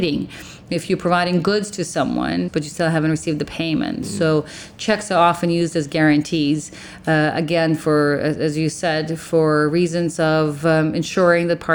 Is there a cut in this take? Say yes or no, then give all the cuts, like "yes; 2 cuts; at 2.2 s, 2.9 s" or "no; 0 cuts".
yes; 1 cut; at 2.5 s